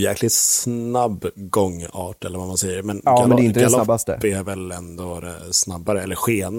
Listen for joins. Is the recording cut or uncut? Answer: uncut